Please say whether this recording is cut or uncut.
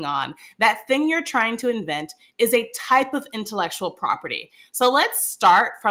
uncut